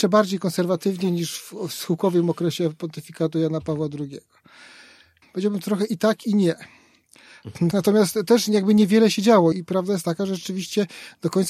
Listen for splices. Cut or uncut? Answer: cut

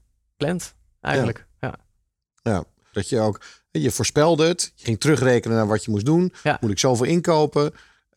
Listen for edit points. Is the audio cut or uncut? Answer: cut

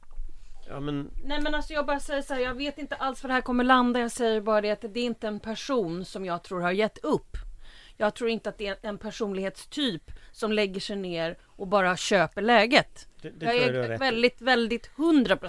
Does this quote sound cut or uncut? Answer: uncut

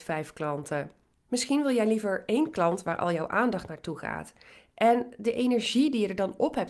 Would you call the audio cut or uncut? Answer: uncut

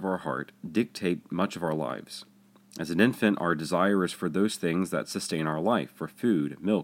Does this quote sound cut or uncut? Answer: uncut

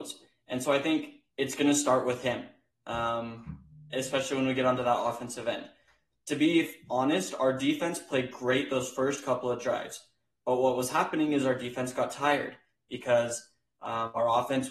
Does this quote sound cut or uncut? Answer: uncut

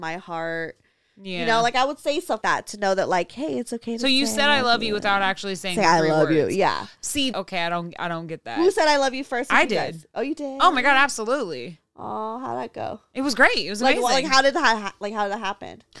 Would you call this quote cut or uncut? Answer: cut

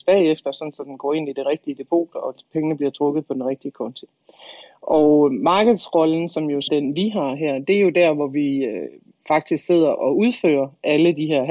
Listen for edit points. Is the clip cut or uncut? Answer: cut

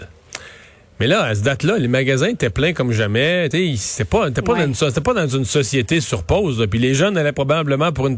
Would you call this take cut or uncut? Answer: uncut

